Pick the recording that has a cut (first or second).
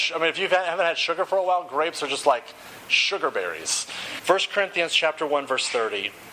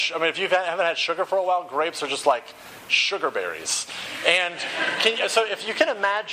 first